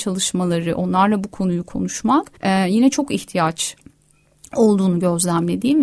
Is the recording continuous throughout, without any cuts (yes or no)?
no